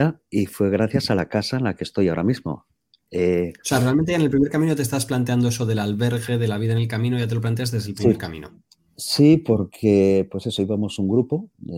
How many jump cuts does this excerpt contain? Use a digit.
0